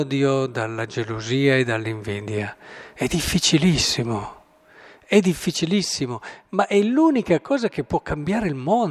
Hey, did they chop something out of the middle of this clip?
no; 0 cuts

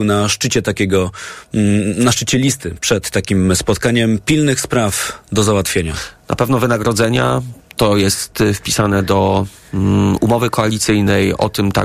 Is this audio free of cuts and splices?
yes; 0 cuts

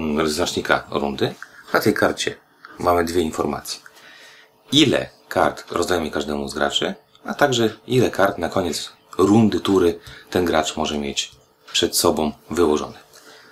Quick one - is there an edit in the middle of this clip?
no; 0 cuts

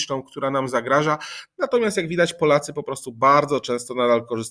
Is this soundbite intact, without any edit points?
yes; 0 cuts

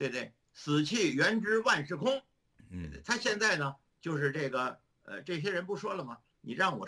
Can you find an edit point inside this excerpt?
no; 0 cuts

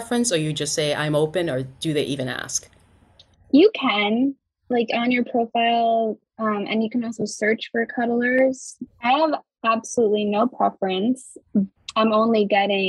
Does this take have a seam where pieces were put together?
yes; 2 cuts; at 8.9 s, 11.8 s

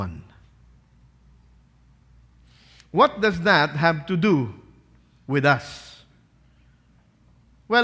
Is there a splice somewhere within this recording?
no; 0 cuts

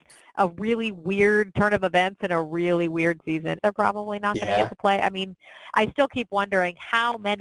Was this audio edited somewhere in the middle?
yes; 1 cut; at 3.6 s

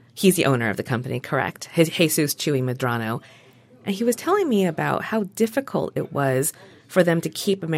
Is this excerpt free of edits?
yes; 0 cuts

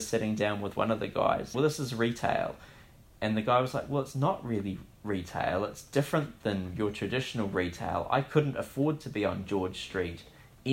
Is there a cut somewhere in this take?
yes; 1 cut; at 1.5 s

